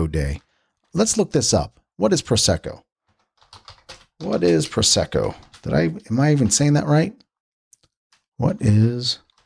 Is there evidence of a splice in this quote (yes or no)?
no